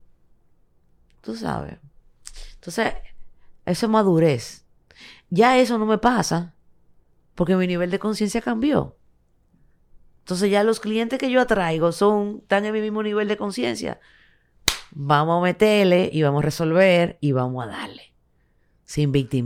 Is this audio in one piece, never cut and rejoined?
yes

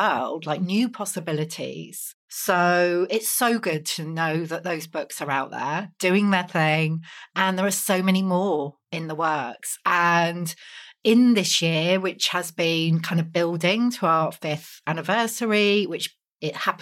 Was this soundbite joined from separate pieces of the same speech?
no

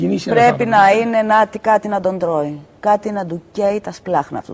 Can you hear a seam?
no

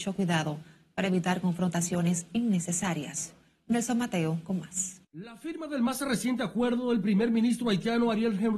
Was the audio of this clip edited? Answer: yes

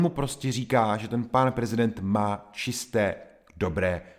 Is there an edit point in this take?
no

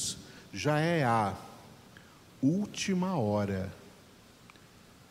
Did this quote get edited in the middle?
no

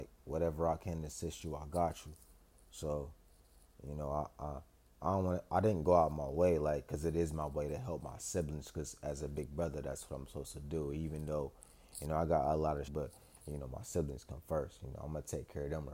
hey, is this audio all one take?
no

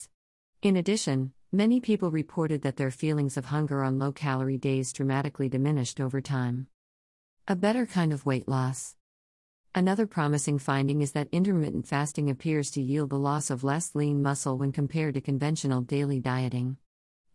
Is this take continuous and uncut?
yes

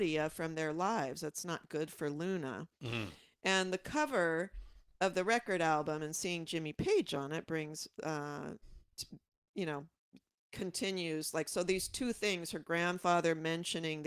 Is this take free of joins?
yes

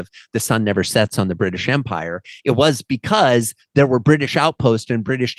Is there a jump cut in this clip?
no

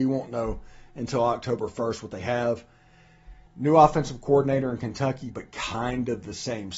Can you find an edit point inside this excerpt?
yes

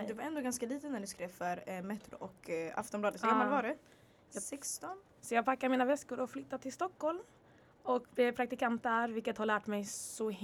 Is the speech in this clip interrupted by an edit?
yes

